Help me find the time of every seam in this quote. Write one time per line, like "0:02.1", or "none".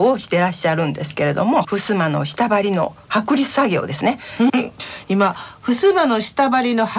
0:01.6
0:04.5